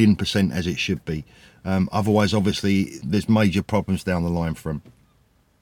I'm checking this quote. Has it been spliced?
yes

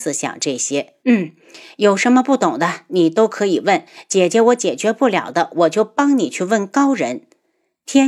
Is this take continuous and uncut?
no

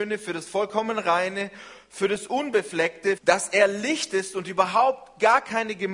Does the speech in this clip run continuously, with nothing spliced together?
no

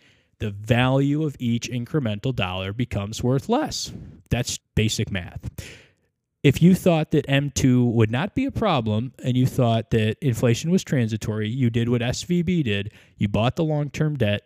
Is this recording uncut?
no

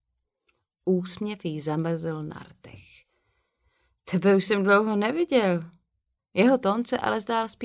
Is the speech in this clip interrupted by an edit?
yes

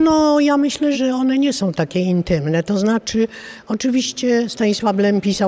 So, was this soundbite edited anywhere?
yes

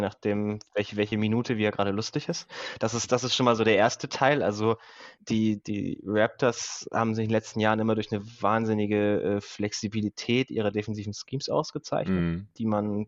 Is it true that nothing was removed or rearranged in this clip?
yes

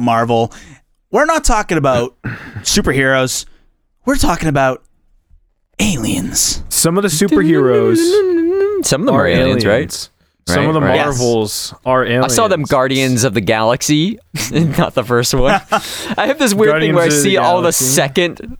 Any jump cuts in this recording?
yes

